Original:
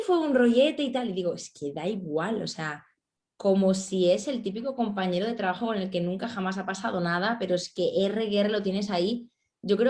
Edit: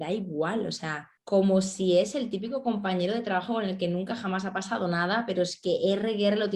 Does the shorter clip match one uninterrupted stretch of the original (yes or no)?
no